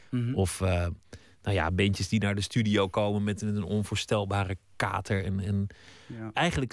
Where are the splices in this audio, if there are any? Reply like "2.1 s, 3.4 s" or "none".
none